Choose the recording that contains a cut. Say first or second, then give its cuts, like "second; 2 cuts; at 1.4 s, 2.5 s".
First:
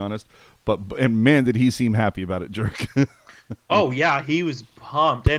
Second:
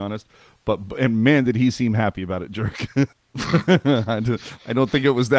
second; 1 cut; at 3.1 s